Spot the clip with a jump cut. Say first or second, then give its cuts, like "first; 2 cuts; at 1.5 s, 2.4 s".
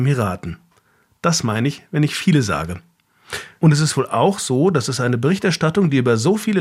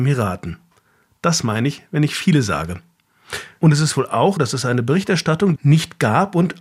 second; 2 cuts; at 4.4 s, 5.6 s